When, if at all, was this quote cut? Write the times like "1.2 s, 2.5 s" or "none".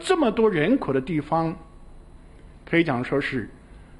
2.5 s